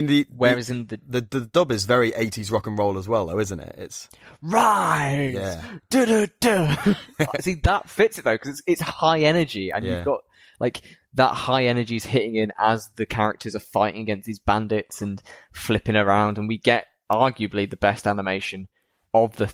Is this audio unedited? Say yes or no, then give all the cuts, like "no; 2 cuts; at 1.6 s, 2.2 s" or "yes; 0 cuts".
yes; 0 cuts